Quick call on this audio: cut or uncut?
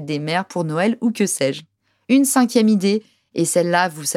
uncut